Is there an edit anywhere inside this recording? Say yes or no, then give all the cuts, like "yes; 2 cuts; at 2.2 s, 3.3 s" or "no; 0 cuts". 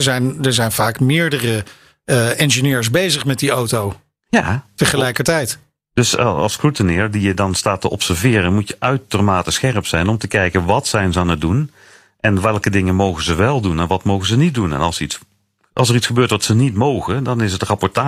no; 0 cuts